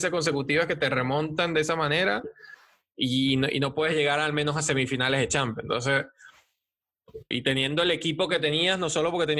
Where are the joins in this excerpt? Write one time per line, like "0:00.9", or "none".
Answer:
0:07.3